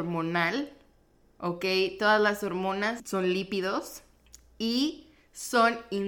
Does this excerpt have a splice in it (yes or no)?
no